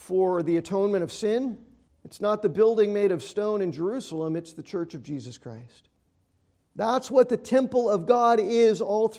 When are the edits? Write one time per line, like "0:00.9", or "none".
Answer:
0:01.9